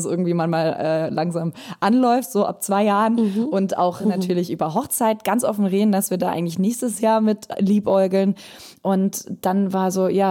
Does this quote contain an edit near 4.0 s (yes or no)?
no